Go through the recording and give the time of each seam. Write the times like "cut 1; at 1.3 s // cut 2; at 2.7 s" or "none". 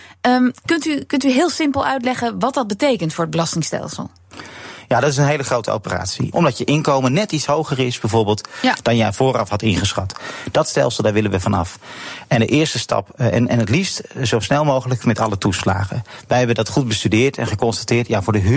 cut 1; at 6.3 s